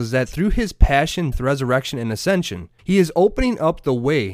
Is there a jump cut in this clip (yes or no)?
yes